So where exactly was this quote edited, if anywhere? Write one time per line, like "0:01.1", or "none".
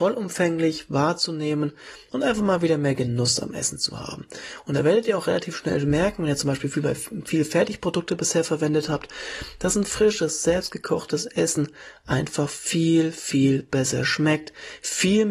none